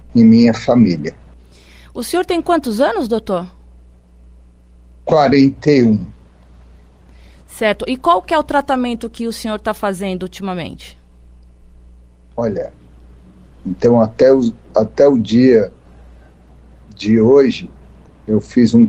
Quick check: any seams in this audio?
no; 0 cuts

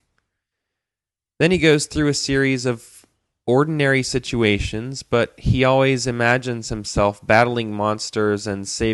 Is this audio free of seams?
yes; 0 cuts

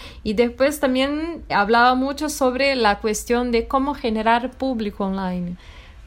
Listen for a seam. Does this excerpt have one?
yes; 1 cut; at 1.5 s

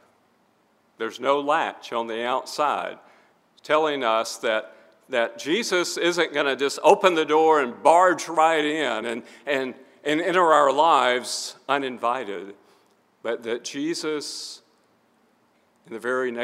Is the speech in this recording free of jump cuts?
yes; 0 cuts

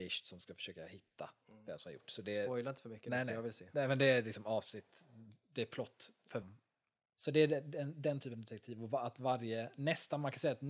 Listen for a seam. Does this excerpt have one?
yes; 1 cut; at 6.4 s

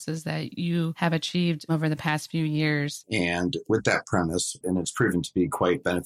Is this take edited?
yes; 2 cuts; at 3.0 s, 4.6 s

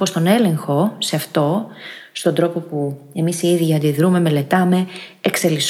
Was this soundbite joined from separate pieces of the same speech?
no; 0 cuts

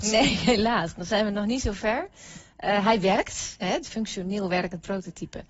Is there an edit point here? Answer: yes; 1 cut; at 3.8 s

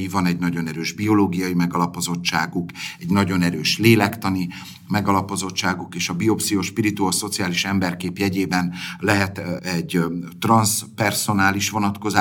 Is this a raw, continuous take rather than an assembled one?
no; 1 cut; at 9.6 s

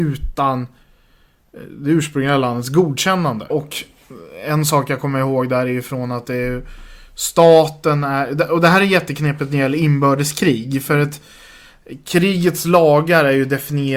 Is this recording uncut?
no; 1 cut; at 3.5 s

